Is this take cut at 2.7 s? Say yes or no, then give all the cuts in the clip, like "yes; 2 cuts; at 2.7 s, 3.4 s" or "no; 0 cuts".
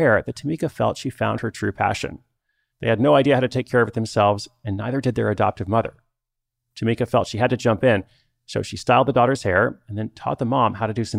yes; 1 cut; at 2.7 s